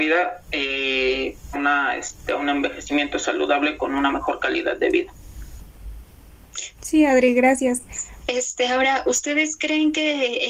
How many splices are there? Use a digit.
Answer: 3